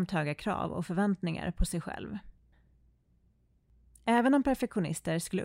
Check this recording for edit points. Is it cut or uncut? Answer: uncut